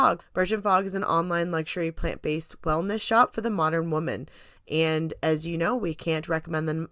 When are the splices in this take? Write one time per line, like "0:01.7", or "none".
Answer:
0:04.6